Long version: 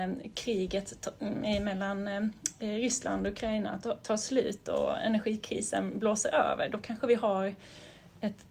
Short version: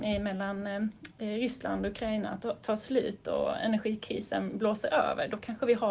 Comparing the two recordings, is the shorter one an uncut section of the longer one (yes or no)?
yes